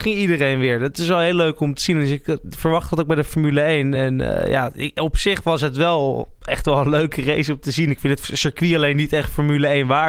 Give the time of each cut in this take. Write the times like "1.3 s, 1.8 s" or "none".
none